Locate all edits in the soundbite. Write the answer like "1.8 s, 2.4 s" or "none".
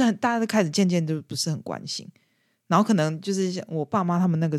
none

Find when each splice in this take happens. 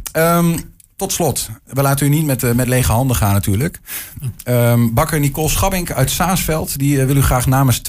1.7 s

